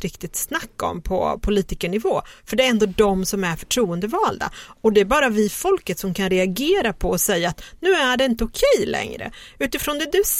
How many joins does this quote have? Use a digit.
0